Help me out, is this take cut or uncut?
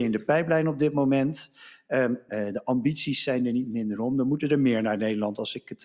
cut